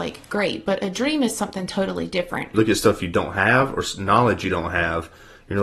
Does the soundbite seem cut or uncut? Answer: cut